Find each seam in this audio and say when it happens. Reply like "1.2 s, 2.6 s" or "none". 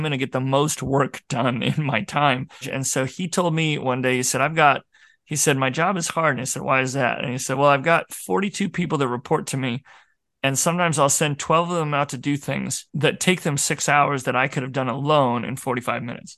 2.6 s